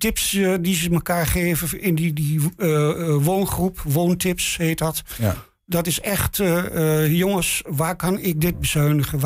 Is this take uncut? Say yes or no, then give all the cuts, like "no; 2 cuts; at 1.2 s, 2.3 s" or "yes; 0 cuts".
yes; 0 cuts